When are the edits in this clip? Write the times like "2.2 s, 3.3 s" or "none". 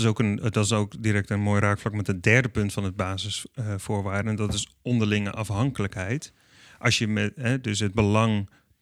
none